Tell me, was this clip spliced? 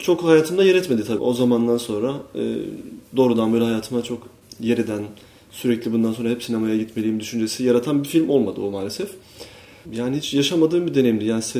yes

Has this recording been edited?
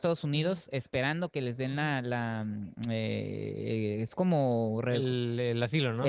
no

